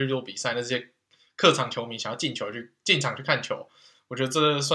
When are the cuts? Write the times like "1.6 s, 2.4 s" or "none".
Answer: none